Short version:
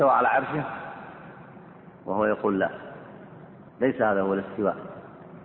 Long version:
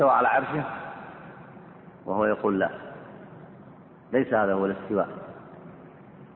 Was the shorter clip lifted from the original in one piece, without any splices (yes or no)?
no